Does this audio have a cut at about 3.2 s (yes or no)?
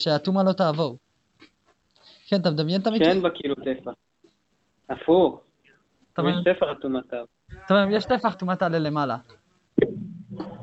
no